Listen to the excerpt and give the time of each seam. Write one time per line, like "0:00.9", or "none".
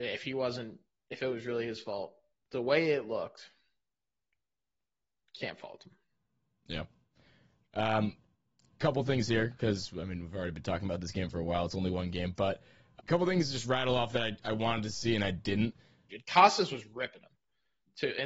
0:13.0
0:16.1